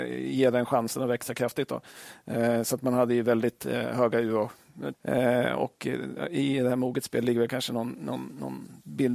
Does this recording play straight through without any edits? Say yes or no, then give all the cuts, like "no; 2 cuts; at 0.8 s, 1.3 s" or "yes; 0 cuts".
no; 1 cut; at 4.9 s